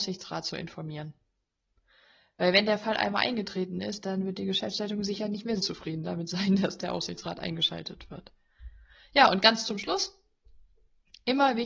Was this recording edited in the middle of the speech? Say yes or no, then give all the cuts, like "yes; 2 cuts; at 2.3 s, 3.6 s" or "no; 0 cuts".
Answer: yes; 1 cut; at 5.6 s